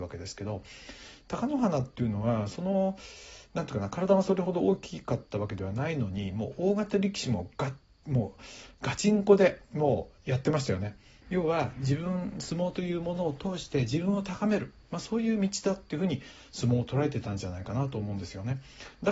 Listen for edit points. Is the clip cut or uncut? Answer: cut